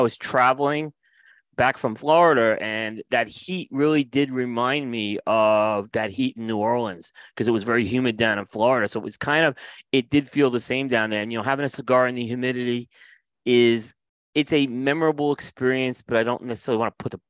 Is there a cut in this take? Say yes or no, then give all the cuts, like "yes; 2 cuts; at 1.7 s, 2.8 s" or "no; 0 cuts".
no; 0 cuts